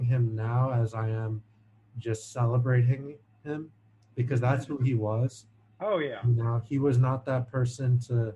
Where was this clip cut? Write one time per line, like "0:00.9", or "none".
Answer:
none